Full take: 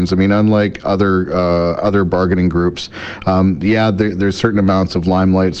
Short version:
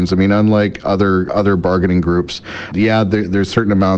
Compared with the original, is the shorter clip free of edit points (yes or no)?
no